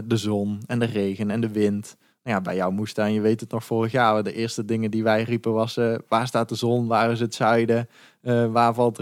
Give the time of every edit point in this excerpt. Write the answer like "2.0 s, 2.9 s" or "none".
none

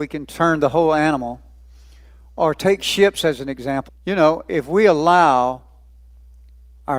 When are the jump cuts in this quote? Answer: 3.9 s

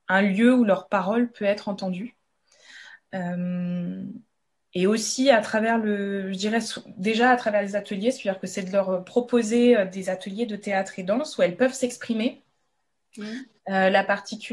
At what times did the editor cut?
none

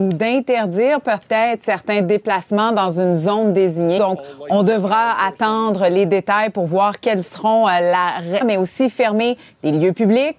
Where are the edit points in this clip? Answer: 4.0 s, 8.4 s

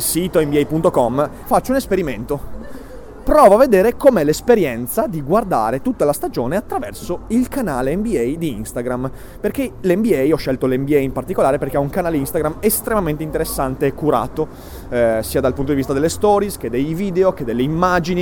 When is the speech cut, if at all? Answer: 1.4 s

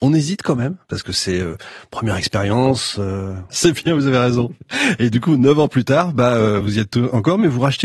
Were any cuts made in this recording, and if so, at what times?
3.5 s, 6.6 s

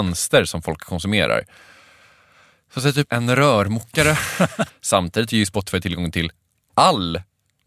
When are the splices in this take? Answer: 3.1 s, 4.7 s

